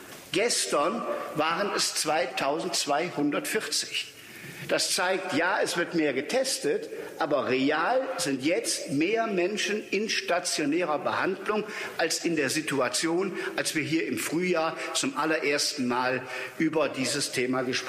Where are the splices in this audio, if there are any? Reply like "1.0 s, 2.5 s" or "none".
none